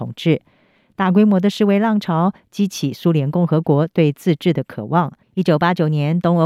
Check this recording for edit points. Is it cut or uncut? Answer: cut